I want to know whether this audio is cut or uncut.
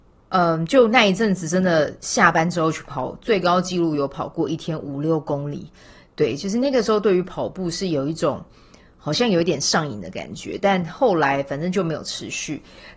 uncut